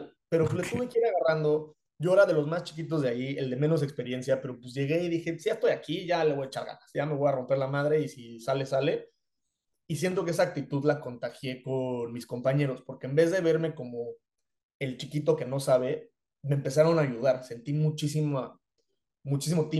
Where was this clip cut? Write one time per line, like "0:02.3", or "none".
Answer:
none